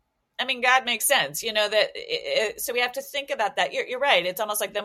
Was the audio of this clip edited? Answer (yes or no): no